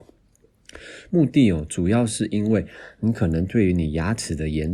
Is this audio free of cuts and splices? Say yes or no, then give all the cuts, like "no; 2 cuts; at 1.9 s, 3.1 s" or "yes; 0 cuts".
no; 1 cut; at 1.1 s